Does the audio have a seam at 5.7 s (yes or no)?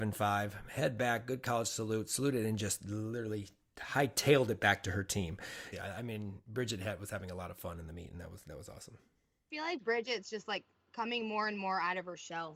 yes